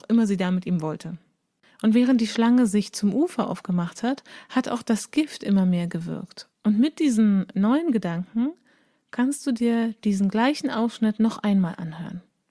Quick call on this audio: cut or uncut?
cut